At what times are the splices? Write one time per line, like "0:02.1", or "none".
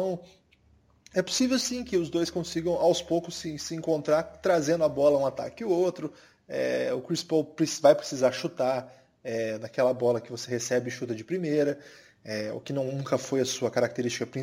none